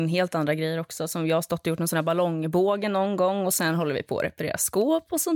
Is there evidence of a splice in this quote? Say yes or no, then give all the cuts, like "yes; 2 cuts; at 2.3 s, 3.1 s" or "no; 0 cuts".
no; 0 cuts